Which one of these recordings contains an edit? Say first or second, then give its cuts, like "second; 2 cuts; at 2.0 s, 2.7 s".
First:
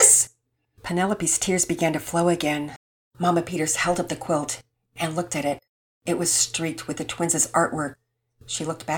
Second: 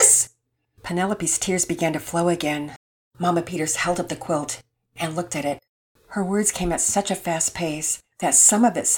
second; 1 cut; at 6.0 s